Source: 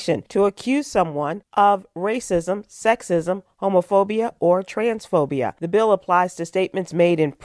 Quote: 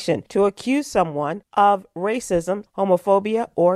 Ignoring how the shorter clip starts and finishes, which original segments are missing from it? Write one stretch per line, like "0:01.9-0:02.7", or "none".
0:02.7-0:03.5